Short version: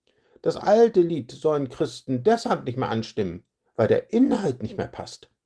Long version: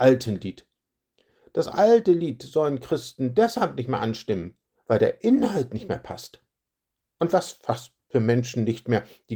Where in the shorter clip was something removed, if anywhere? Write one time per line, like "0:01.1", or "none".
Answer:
none